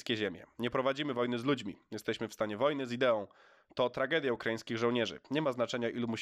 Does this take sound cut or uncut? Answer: uncut